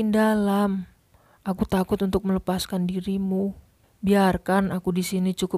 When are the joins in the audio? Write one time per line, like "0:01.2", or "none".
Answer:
0:03.8